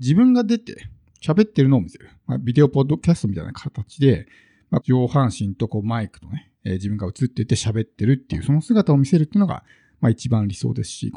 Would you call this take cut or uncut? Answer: cut